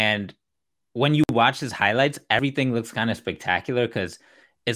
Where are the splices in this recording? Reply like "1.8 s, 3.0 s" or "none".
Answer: none